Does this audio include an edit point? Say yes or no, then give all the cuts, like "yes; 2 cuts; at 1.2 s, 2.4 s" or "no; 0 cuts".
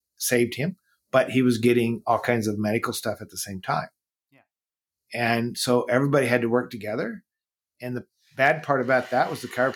no; 0 cuts